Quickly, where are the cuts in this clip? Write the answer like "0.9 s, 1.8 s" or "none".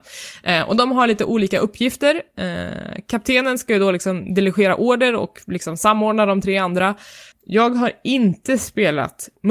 7.3 s

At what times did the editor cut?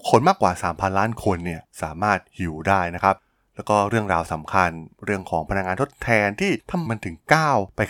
6.9 s

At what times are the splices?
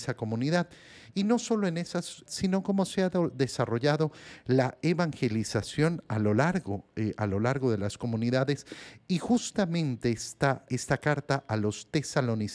2.2 s, 10.7 s

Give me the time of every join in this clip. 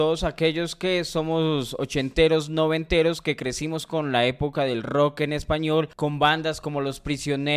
5.9 s

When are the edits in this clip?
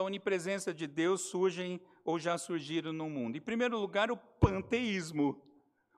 none

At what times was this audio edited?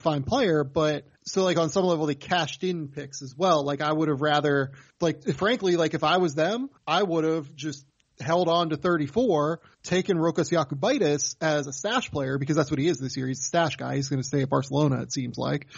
none

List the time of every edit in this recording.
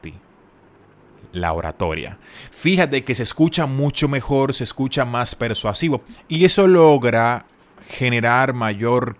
none

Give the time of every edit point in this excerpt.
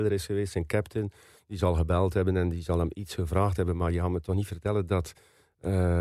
none

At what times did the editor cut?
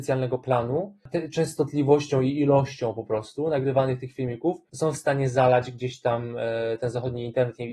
none

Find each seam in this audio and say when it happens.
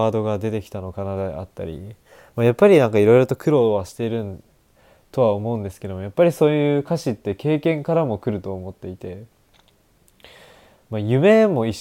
none

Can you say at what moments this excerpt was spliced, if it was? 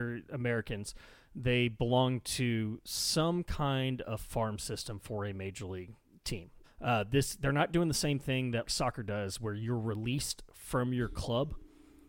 6.6 s, 8.7 s

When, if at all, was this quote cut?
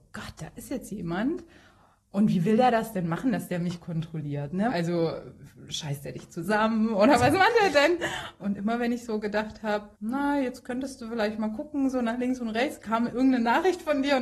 4.7 s, 8.4 s, 9.9 s

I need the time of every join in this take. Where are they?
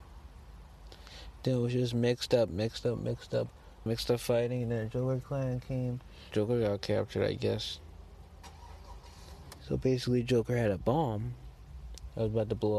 3.9 s, 6.3 s, 9.6 s

